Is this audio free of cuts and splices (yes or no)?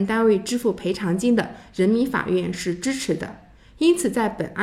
yes